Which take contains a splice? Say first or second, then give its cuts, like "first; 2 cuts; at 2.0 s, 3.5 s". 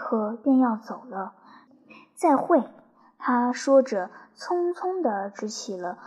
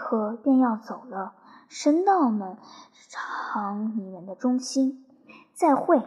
first; 1 cut; at 1.7 s